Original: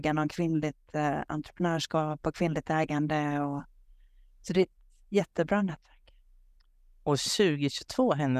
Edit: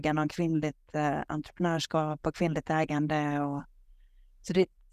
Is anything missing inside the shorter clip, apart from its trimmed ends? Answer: no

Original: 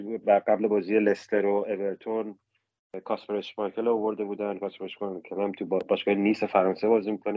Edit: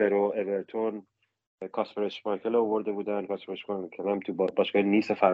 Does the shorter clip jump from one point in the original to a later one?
no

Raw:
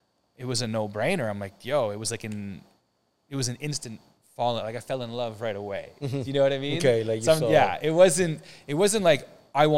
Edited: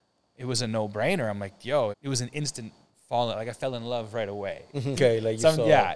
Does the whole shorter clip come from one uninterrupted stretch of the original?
no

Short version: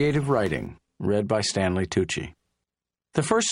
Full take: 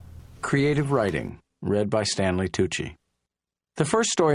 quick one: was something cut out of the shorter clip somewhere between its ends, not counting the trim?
no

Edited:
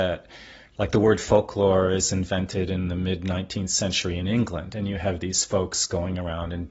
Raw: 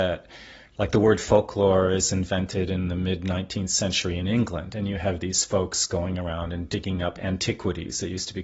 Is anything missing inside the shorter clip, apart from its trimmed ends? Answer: no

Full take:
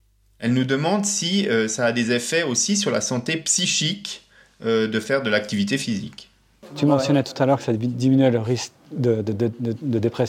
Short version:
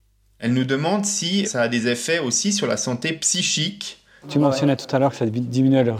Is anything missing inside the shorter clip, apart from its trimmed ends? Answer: yes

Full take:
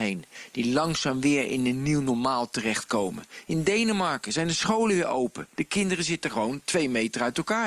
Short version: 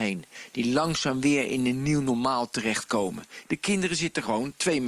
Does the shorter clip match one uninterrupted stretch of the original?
no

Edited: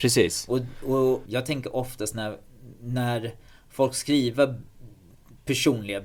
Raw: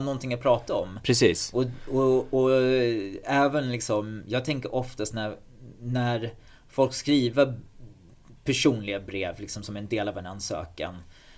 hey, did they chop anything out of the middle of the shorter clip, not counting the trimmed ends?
yes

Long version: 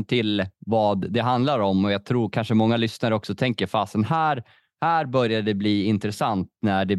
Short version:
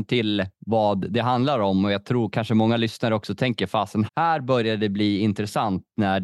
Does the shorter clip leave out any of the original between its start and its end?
yes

